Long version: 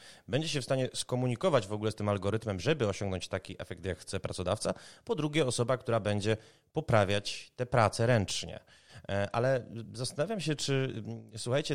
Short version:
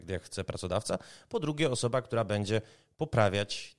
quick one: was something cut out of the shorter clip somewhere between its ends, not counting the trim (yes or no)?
no